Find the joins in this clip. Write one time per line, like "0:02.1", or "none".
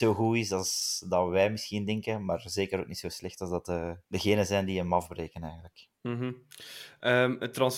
0:04.0

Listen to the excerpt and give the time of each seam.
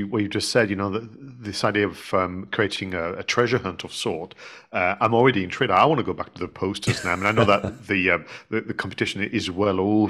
none

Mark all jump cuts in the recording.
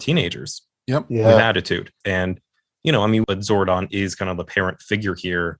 0:02.0
0:03.2

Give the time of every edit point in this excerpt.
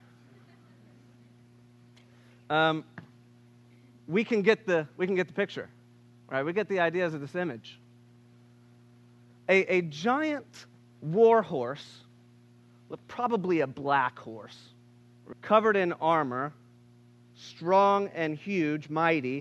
0:15.3

